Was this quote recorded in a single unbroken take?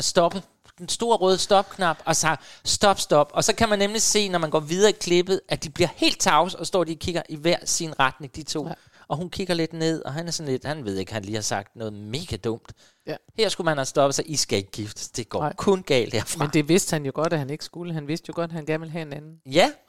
yes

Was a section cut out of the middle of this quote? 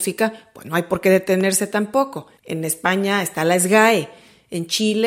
yes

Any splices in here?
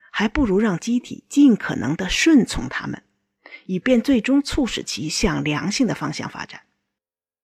no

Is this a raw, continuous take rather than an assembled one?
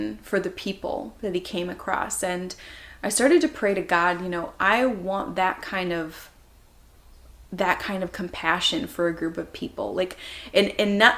yes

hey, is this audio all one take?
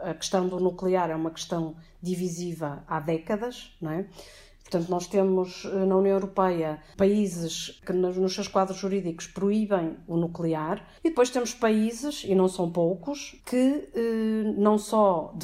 no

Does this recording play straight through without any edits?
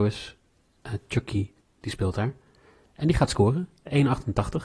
no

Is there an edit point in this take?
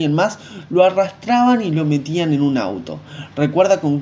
no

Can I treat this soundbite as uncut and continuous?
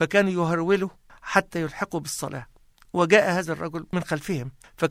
yes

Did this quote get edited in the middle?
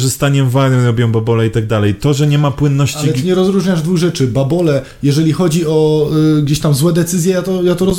no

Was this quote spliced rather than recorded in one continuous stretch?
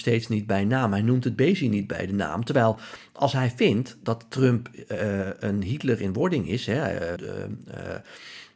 yes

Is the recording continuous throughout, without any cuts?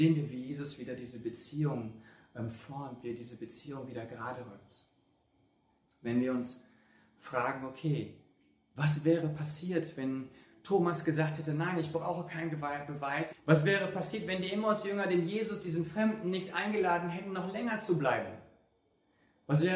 no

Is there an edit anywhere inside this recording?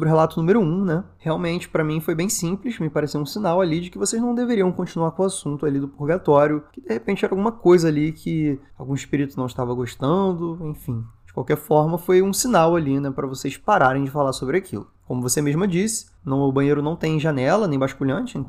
no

